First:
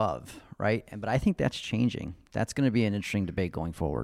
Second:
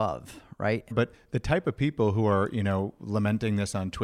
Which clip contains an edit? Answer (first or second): second